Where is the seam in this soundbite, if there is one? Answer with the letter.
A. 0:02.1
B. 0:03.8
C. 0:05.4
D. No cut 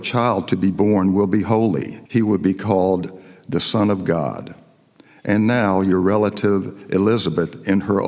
A